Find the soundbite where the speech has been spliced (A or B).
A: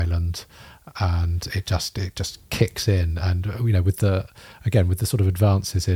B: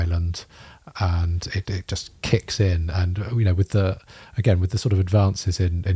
B